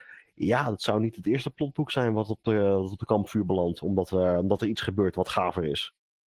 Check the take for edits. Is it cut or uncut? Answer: uncut